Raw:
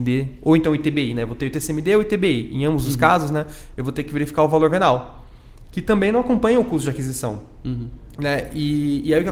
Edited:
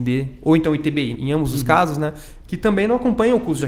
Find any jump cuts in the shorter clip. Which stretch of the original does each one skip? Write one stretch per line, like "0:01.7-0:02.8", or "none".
0:01.2-0:02.5
0:03.8-0:05.7